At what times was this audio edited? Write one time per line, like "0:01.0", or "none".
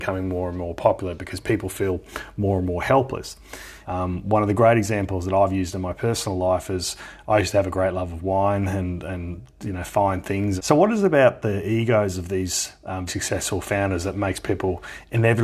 0:03.8
0:10.6
0:13.1